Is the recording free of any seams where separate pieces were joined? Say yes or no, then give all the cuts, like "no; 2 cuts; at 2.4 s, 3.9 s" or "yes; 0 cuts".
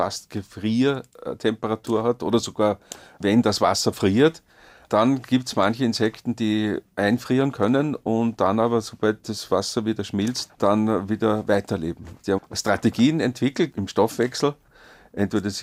no; 3 cuts; at 10.5 s, 12.4 s, 13.7 s